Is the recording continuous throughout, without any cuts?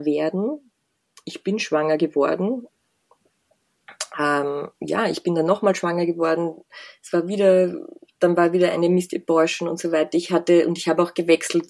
yes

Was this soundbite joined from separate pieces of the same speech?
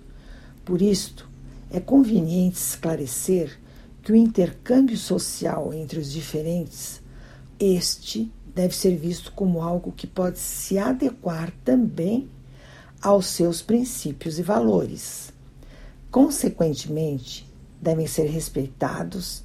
yes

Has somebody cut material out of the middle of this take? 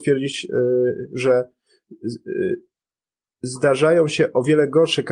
no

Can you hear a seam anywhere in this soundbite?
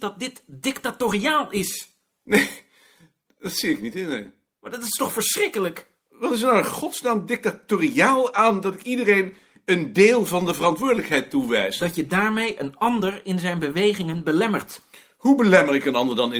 yes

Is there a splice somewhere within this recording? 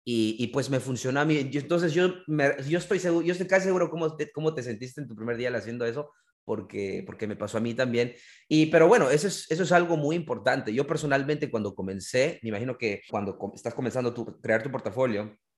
yes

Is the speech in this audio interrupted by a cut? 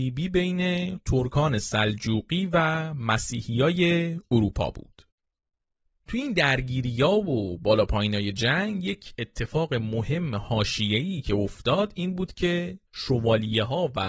yes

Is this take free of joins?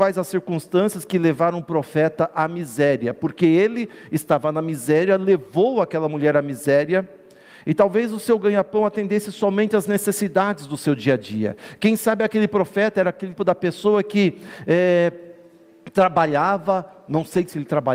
no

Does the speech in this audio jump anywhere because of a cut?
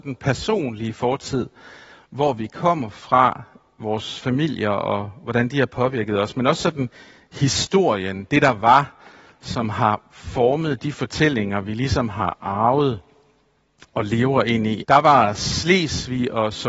yes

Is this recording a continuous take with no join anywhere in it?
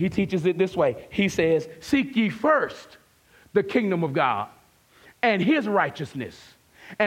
yes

